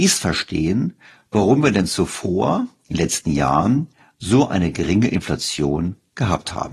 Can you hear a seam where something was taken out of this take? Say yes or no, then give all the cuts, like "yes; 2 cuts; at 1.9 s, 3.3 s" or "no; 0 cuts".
no; 0 cuts